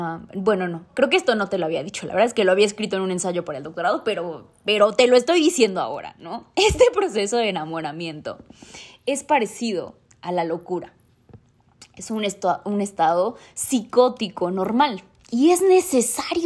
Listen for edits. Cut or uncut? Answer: uncut